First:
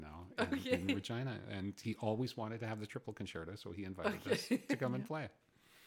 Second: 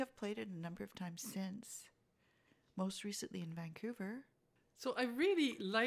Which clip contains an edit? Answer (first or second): second